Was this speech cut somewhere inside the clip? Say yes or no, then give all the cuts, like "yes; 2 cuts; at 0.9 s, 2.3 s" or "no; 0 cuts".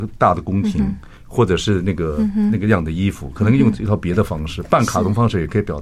no; 0 cuts